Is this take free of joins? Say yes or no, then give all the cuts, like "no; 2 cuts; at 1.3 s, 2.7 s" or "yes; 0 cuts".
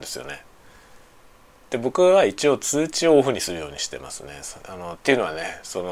no; 1 cut; at 5.0 s